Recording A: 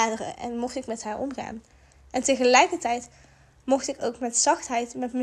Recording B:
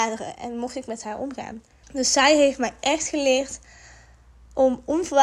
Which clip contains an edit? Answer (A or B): B